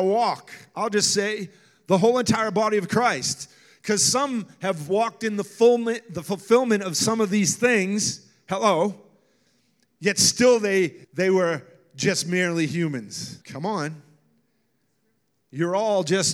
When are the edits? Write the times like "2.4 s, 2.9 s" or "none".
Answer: 11.0 s, 13.4 s